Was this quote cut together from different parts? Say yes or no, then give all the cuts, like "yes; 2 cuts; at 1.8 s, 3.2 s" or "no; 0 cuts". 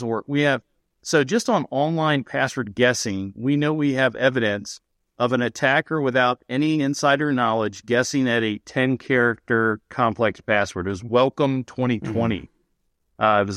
no; 0 cuts